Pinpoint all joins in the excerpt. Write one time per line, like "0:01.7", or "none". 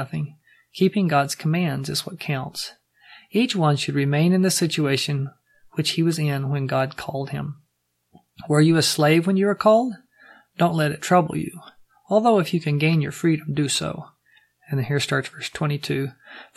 none